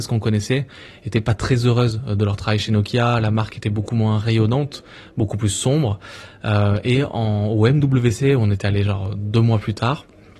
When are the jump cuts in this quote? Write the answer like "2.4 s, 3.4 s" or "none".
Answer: none